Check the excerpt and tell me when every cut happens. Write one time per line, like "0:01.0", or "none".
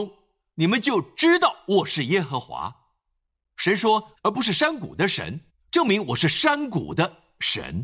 0:04.1
0:05.5